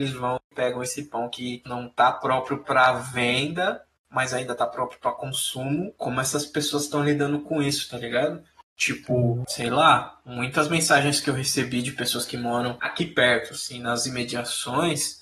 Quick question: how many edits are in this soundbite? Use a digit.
0